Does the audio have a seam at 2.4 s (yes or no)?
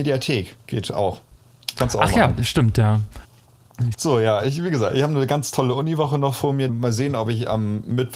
no